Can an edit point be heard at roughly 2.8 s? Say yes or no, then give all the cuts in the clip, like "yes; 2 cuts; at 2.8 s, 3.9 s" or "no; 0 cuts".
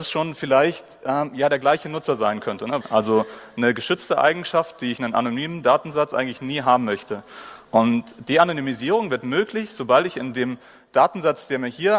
yes; 1 cut; at 2.8 s